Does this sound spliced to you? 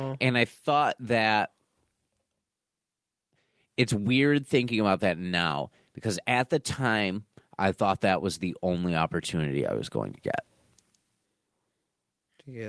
no; 0 cuts

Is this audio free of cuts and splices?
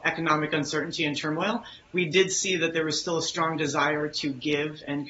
yes; 0 cuts

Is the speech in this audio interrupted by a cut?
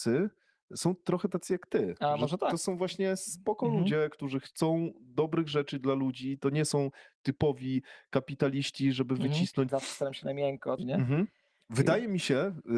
yes; 2 cuts; at 9.7 s, 10.8 s

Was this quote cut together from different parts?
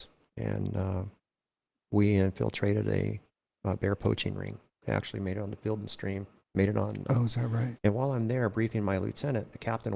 yes; 1 cut; at 7.8 s

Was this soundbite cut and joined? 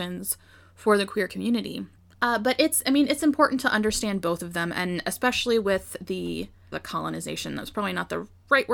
yes; 2 cuts; at 2.1 s, 6.7 s

